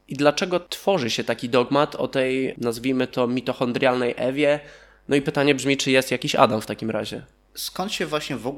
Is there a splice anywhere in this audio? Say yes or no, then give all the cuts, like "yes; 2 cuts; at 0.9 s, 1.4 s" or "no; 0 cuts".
no; 0 cuts